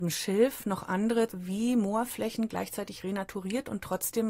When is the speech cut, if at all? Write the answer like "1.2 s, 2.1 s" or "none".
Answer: 1.3 s